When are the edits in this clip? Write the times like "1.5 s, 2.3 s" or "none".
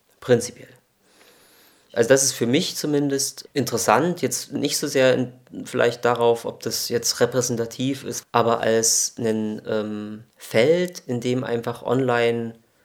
8.2 s, 10.3 s